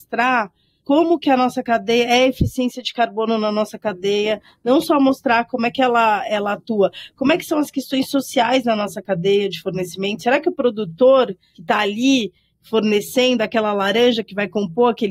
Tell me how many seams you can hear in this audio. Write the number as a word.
zero